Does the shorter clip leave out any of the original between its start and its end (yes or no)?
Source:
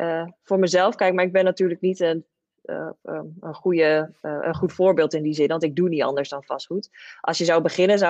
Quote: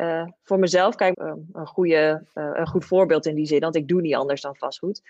yes